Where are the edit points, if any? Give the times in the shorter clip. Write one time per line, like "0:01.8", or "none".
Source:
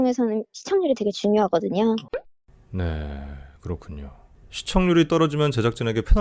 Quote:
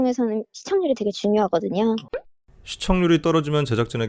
0:02.6